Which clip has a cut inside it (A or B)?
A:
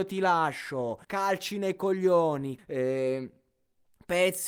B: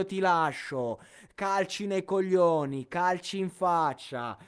A